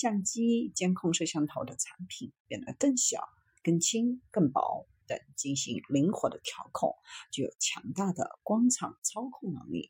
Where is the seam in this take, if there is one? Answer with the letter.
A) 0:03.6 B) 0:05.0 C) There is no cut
B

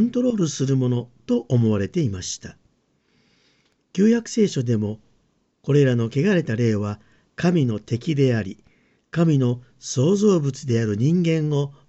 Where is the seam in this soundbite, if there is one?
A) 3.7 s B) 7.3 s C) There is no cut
C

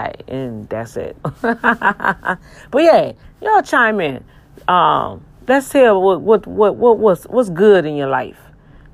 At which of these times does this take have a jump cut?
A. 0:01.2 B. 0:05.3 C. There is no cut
A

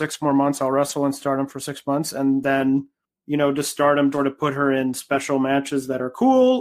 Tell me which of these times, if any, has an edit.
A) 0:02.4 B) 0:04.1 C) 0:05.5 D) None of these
B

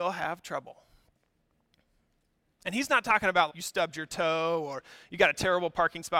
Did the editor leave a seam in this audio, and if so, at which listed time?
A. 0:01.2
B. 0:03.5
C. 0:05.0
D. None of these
B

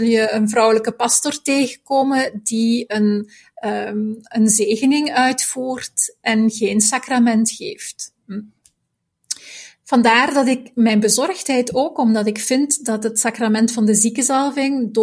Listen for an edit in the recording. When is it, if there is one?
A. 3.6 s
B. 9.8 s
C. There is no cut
C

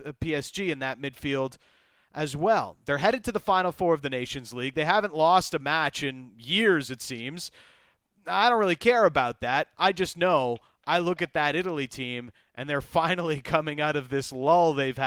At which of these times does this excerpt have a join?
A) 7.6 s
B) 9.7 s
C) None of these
C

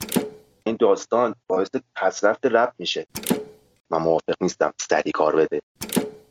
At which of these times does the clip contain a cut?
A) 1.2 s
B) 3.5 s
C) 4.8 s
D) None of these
D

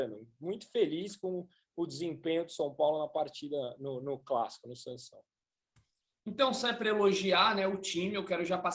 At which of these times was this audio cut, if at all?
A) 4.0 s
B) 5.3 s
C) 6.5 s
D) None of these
D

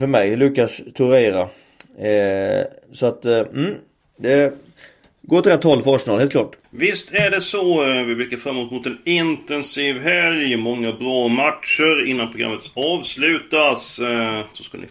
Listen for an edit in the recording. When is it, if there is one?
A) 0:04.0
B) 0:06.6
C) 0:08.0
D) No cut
B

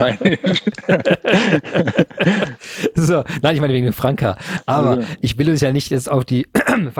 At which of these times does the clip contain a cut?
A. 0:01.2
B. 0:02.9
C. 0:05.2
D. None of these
D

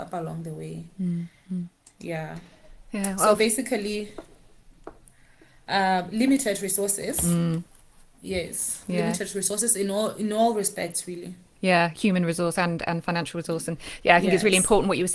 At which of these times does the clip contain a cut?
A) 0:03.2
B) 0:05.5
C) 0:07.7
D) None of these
D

